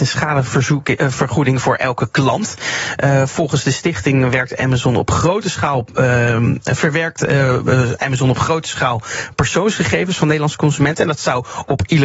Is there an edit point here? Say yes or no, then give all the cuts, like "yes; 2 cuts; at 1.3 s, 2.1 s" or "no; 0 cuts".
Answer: no; 0 cuts